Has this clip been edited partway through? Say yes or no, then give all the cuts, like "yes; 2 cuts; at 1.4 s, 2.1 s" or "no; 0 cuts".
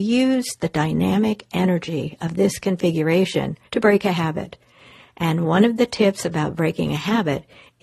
yes; 1 cut; at 3.7 s